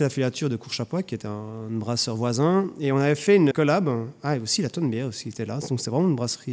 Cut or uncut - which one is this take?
cut